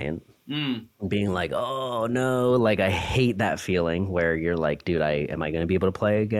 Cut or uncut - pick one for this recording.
uncut